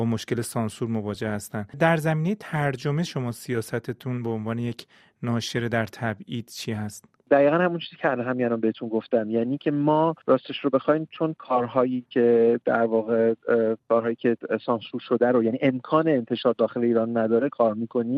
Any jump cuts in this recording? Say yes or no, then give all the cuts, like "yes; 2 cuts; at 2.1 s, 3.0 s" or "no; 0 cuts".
yes; 1 cut; at 13.8 s